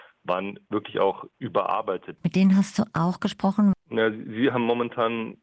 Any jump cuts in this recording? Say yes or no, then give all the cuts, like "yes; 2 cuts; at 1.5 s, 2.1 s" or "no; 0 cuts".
yes; 2 cuts; at 2.2 s, 3.7 s